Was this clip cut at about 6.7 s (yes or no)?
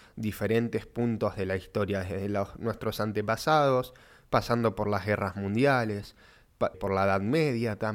yes